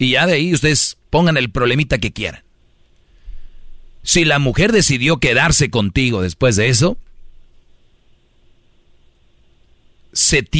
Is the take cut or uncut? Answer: uncut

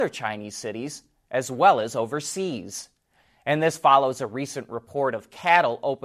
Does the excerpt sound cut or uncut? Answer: uncut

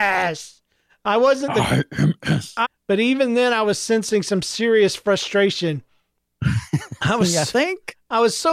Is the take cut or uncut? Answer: cut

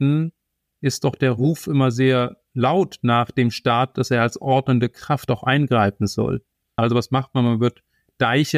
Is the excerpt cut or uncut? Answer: cut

